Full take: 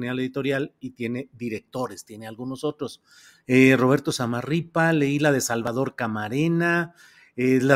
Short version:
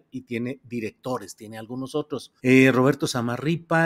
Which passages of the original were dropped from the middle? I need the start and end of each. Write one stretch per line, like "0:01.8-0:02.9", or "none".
0:03.1-0:03.4

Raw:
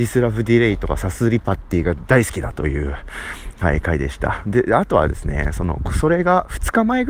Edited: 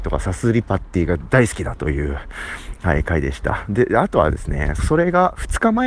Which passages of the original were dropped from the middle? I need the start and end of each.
0:05.5-0:05.9

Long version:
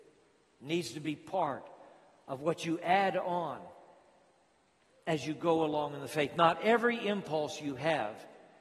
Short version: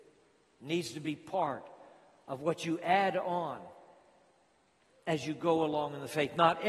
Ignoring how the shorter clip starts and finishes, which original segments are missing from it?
none

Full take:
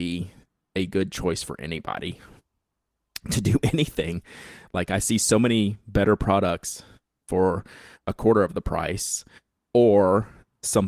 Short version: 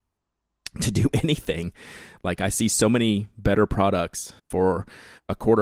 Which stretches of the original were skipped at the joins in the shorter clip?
0:06.9-0:07.2

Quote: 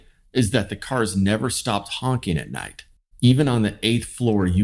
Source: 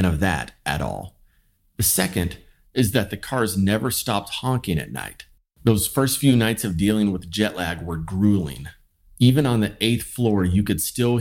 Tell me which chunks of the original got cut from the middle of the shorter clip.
0:05.5-0:09.1

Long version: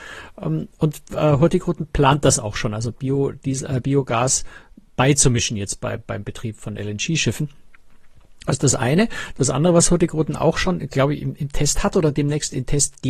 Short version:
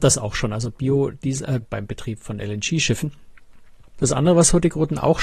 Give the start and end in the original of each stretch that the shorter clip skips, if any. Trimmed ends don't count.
0:03.8-0:06.0
0:08.3-0:09.3

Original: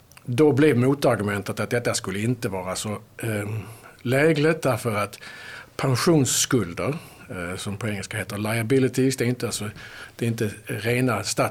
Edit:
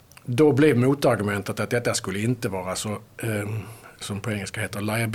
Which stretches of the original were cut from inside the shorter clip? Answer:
0:04.0-0:07.6

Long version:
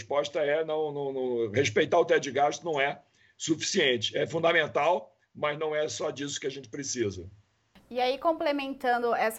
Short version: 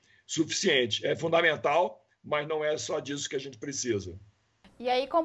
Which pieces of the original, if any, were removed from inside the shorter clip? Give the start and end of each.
none

